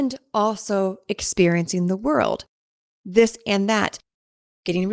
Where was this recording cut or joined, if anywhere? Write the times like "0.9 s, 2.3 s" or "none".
none